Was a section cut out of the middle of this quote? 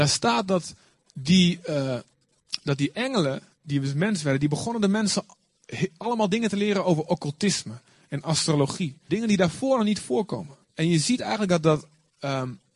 yes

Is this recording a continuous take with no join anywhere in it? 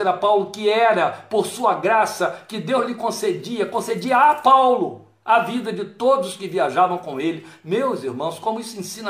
yes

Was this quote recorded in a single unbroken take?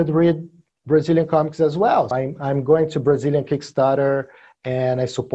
no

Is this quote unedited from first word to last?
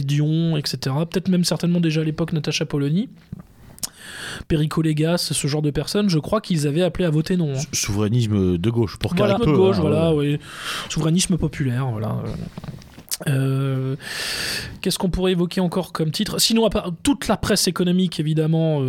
no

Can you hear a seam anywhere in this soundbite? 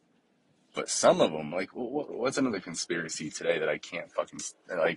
yes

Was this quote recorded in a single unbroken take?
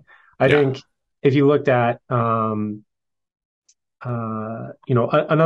yes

